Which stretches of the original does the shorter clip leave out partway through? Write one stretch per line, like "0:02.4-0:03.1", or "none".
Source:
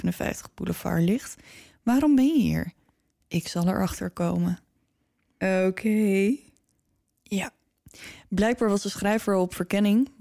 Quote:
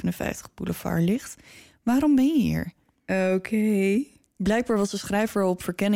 0:02.9-0:05.3
0:06.7-0:08.3

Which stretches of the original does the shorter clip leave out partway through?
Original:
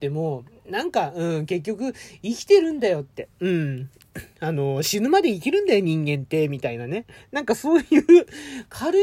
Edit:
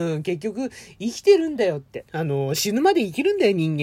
0:03.3-0:04.3

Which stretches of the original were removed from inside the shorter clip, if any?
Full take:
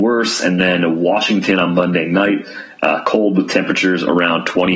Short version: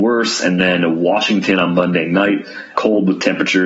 0:02.7-0:03.0

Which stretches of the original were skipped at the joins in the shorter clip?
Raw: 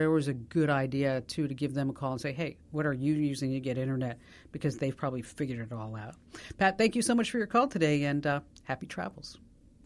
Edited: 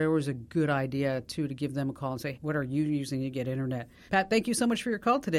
0:02.3-0:02.6
0:04.4-0:06.5

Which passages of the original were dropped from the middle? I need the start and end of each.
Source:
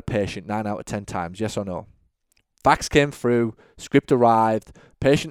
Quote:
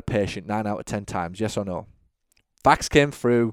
none

